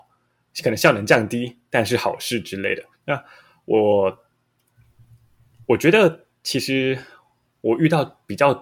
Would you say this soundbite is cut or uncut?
cut